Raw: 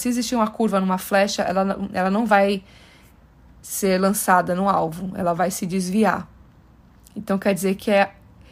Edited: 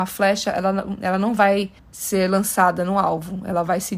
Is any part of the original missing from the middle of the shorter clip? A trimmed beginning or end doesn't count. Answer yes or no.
yes